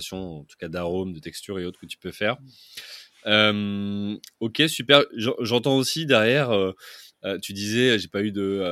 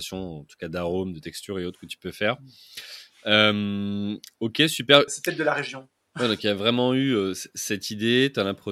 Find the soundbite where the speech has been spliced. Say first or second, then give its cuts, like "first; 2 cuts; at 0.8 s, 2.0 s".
second; 1 cut; at 5.1 s